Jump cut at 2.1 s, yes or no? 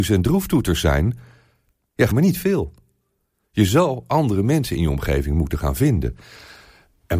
yes